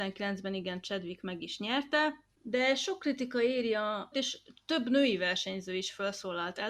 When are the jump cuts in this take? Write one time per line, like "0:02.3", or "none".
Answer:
0:04.1